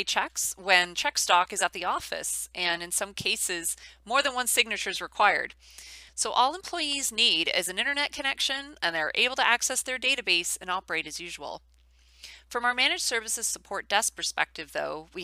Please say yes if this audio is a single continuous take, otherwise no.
no